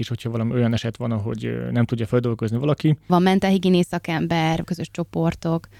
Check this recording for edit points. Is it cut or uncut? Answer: cut